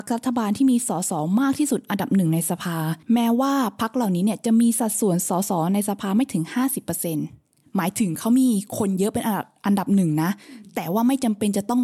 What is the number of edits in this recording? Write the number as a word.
one